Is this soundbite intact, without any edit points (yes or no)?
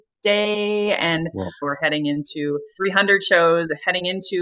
no